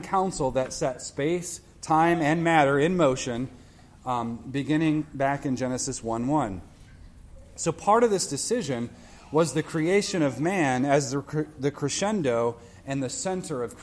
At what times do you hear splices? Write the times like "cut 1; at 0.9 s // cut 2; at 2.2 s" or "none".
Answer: none